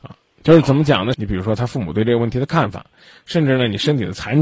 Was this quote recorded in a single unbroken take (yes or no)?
no